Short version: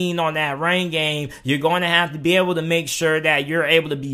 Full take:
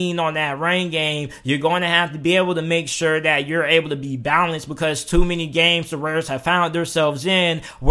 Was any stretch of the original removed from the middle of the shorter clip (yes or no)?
no